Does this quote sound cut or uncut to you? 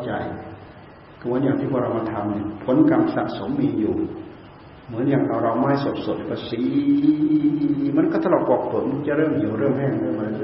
uncut